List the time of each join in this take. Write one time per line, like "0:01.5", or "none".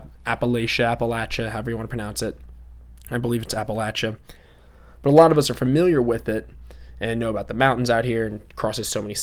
none